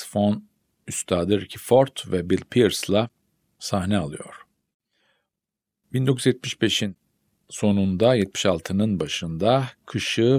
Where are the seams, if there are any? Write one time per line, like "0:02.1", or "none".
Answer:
none